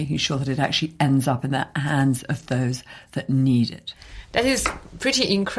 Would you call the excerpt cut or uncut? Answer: uncut